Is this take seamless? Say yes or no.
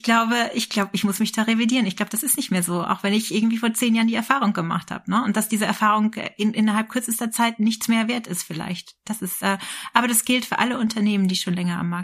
yes